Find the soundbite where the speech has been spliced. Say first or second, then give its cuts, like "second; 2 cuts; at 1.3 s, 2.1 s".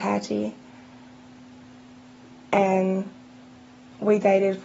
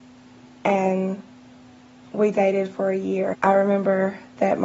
second; 1 cut; at 3.3 s